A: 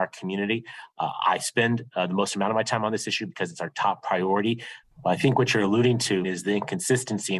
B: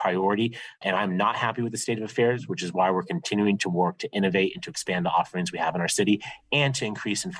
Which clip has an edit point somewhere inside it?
A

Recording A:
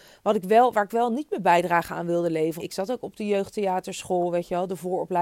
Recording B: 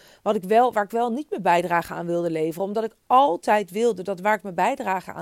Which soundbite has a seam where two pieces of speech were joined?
A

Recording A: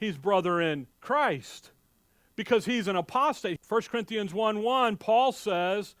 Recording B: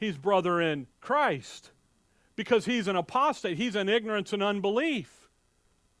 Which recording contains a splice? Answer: A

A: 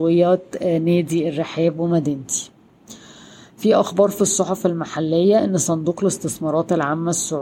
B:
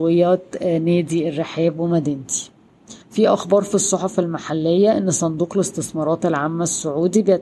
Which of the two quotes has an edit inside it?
B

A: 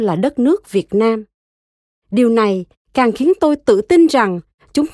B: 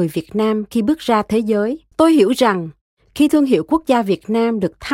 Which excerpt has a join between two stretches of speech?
B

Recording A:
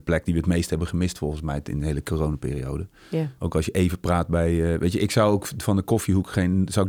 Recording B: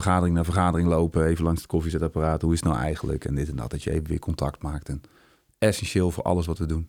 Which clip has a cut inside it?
A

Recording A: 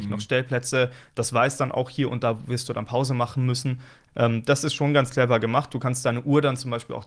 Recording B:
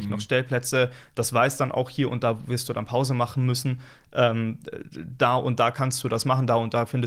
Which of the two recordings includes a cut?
A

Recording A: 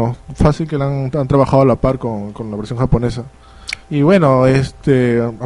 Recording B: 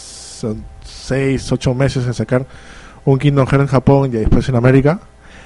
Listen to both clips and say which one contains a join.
A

